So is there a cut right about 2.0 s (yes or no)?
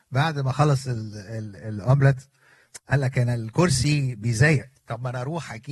no